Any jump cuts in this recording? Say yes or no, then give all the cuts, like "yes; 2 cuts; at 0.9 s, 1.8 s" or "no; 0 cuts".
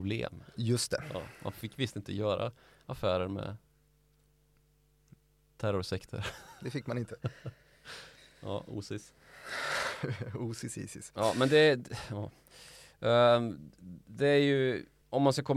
no; 0 cuts